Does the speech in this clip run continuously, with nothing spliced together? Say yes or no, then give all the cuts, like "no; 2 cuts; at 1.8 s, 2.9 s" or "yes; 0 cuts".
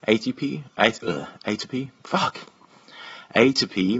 yes; 0 cuts